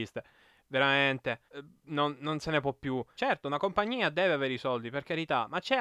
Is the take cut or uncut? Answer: cut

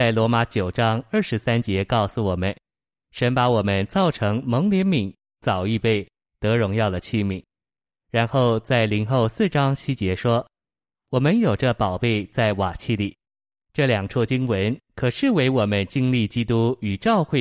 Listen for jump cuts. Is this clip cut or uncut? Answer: uncut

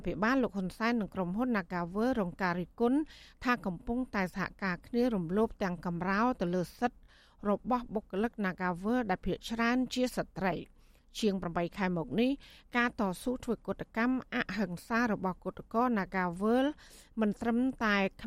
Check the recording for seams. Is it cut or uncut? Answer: uncut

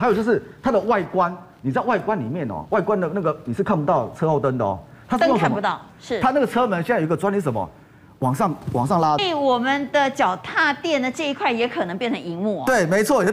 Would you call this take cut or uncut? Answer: cut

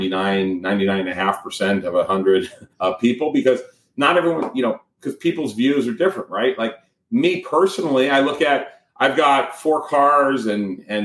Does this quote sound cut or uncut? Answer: cut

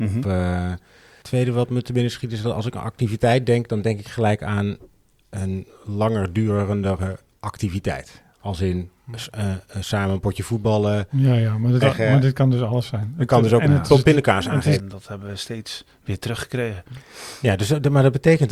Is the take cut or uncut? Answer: cut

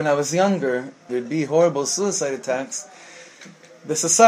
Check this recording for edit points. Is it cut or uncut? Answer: cut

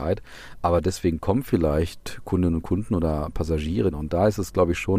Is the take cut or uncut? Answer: cut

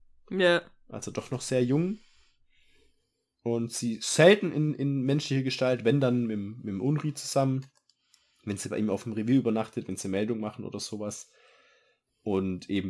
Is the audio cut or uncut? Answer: uncut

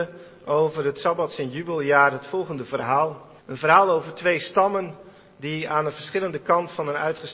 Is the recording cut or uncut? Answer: cut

